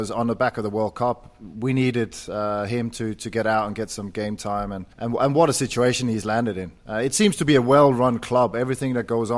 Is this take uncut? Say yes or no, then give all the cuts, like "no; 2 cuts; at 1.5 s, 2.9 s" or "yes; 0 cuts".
no; 1 cut; at 4.9 s